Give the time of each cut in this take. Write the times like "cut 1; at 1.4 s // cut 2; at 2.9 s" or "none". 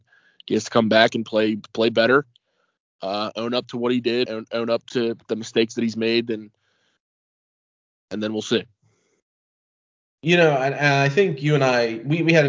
cut 1; at 4.3 s